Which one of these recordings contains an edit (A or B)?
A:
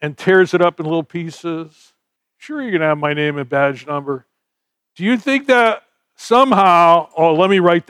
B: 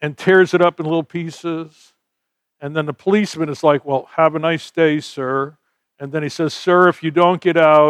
A